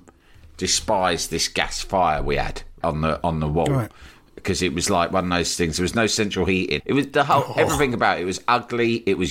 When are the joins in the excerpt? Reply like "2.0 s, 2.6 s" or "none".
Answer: 2.8 s, 6.8 s